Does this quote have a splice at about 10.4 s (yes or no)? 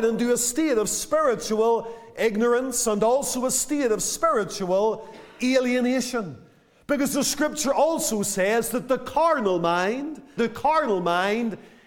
yes